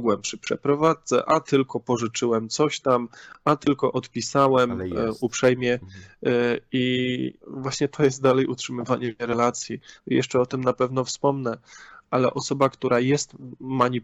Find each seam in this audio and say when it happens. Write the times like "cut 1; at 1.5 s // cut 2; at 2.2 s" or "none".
cut 1; at 7.4 s // cut 2; at 10.0 s